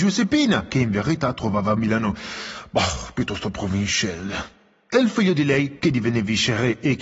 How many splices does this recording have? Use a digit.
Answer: 1